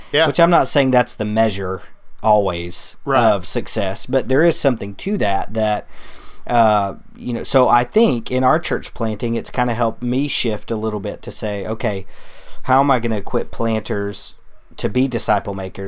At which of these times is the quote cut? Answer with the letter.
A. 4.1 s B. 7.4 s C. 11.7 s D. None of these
D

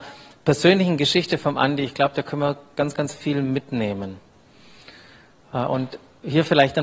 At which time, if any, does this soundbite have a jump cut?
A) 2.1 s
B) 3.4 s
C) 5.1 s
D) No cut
D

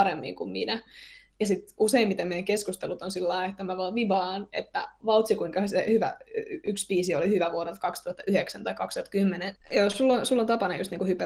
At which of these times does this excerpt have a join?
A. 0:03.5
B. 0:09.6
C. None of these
B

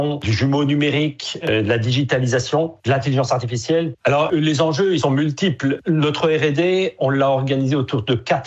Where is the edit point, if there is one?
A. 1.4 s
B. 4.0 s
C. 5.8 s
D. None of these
B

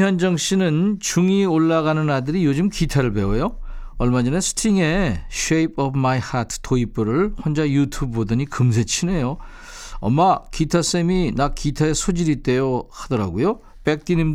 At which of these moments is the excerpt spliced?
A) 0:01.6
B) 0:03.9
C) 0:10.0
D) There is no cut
D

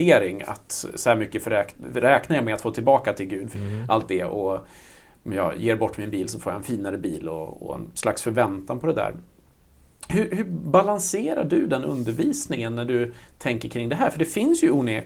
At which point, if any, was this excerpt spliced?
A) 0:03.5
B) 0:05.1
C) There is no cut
A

